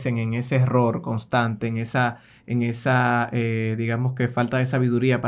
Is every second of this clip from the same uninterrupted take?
yes; 0 cuts

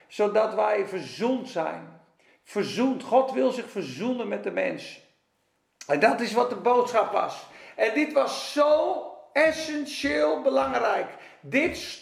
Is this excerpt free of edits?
yes; 0 cuts

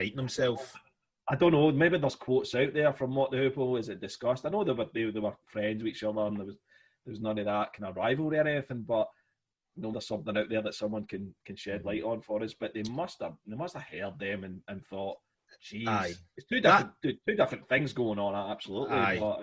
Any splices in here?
yes; 1 cut; at 9.9 s

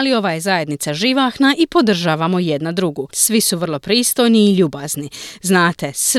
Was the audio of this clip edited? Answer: no; 0 cuts

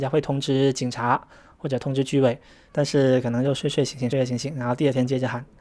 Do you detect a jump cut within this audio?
yes; 2 cuts; at 2.7 s, 4.1 s

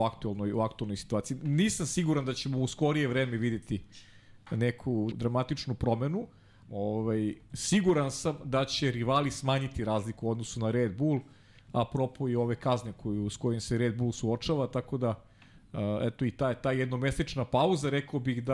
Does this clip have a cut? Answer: yes; 2 cuts; at 5.1 s, 6.6 s

